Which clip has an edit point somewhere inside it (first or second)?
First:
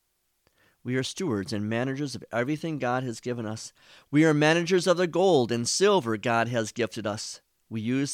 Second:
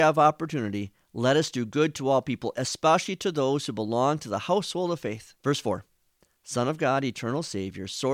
second